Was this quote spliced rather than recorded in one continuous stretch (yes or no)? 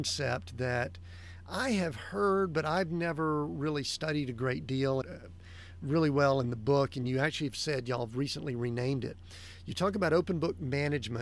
yes